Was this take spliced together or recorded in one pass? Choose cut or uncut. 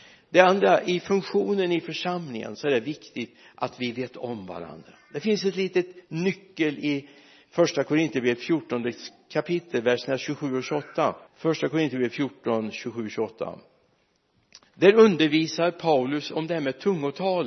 cut